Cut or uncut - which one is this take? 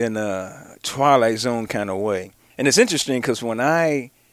cut